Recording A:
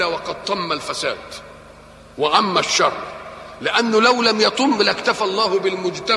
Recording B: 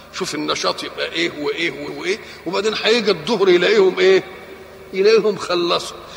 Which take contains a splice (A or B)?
B